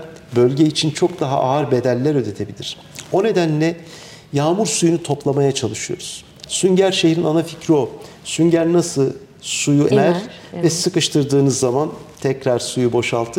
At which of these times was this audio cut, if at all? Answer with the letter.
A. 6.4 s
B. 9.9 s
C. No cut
B